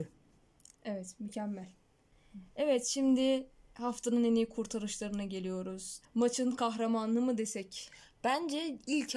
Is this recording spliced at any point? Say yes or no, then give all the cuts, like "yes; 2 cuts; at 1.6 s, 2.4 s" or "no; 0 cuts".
yes; 1 cut; at 6.0 s